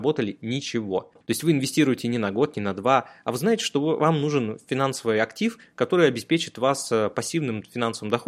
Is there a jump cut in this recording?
yes; 1 cut; at 1.2 s

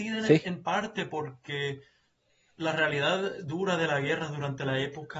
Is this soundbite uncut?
yes; 0 cuts

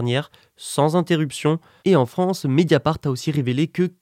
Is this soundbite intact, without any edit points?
no; 1 cut; at 1.8 s

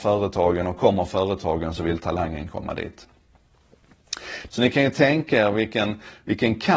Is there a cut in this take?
yes; 1 cut; at 4.5 s

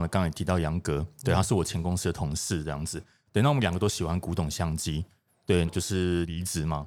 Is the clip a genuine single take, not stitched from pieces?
no; 1 cut; at 5.7 s

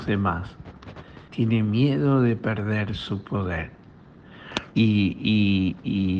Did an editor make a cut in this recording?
yes; 2 cuts; at 1.3 s, 4.7 s

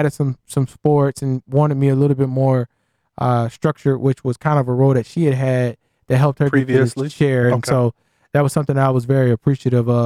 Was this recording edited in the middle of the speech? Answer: no; 0 cuts

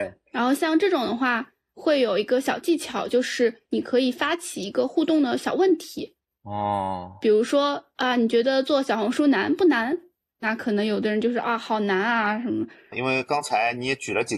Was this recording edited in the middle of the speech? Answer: yes; 1 cut; at 12.9 s

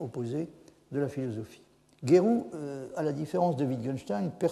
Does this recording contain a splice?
no; 0 cuts

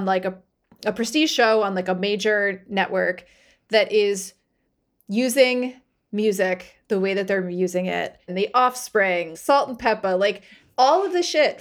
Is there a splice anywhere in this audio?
yes; 2 cuts; at 8.3 s, 9.3 s

